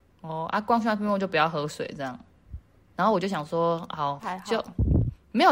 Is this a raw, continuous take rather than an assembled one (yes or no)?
no